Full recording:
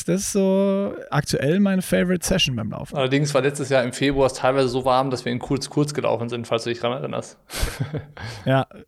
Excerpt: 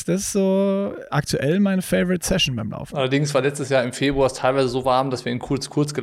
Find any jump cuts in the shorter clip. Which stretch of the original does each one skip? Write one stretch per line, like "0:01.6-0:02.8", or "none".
none